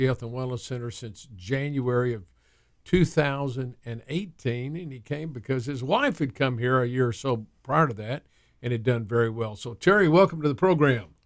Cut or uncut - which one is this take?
uncut